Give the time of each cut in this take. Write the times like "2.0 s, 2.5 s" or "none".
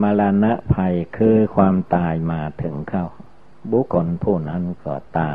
3.9 s